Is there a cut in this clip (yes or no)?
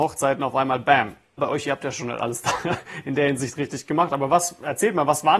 yes